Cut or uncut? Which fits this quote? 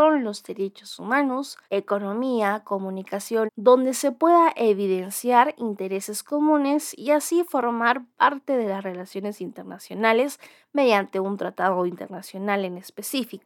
cut